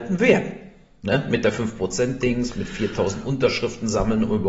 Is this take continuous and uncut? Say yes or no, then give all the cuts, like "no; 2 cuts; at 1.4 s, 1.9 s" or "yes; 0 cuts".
yes; 0 cuts